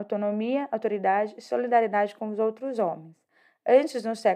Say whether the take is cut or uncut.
uncut